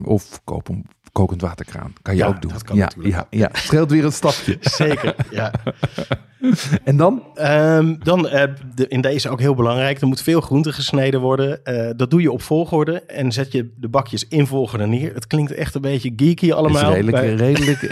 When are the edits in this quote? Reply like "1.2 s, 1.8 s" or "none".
none